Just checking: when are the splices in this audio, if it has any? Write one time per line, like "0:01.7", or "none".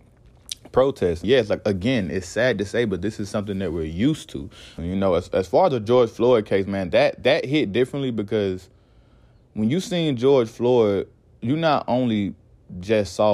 0:01.2
0:04.8